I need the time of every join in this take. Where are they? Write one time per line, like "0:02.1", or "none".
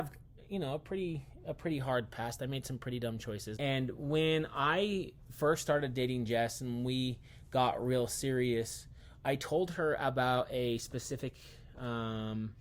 0:03.6